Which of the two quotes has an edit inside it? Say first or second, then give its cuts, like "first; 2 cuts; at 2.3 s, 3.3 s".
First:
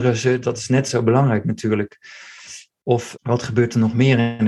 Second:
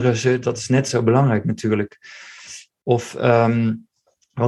first; 1 cut; at 3.1 s